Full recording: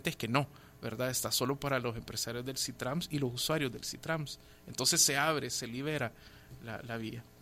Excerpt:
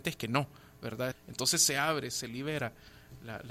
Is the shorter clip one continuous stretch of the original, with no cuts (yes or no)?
no